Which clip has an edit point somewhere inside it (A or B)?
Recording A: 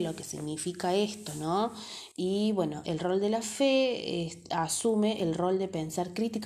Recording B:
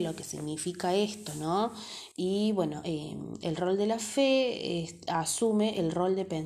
A